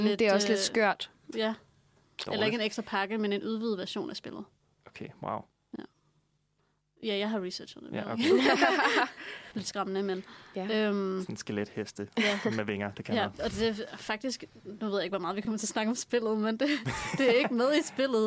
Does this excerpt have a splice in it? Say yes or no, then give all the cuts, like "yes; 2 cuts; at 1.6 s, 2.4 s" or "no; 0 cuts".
yes; 2 cuts; at 1.3 s, 9.5 s